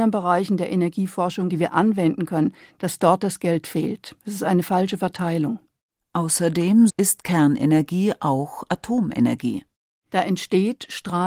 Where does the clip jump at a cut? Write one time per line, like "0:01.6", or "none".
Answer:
0:01.5
0:06.9